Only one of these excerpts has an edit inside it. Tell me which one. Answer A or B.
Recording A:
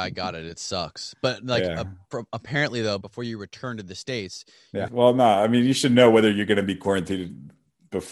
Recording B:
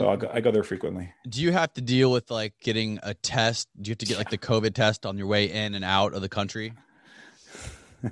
A